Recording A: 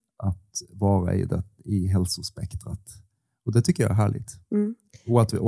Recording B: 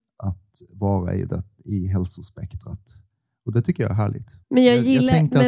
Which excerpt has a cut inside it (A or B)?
B